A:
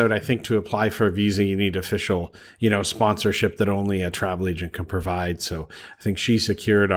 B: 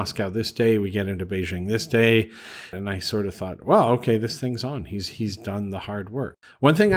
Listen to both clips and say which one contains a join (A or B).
B